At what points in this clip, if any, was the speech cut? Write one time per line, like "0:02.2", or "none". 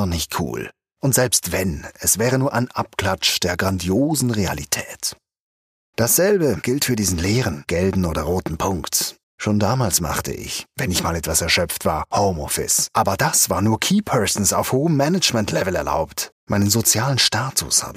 0:09.2
0:16.3